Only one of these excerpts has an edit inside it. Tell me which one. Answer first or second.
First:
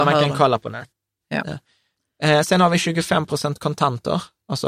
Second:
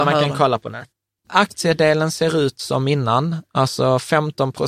second